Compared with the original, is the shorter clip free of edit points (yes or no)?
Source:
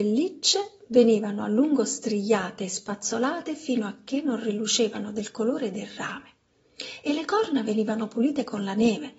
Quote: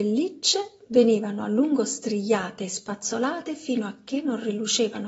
yes